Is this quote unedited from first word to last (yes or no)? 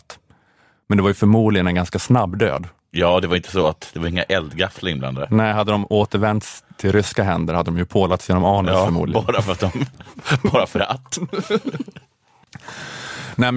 yes